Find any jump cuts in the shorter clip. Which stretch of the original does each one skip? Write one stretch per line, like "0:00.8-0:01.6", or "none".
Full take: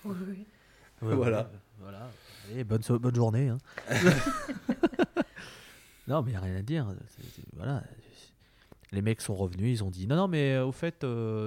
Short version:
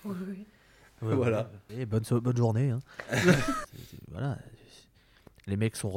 0:01.7-0:02.5
0:04.4-0:07.1